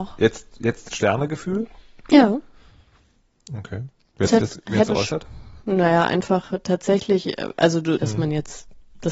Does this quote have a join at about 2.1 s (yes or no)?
no